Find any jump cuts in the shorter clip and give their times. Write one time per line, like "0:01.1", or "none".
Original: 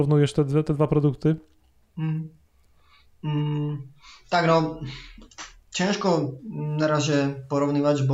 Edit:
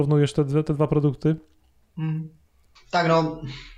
0:02.8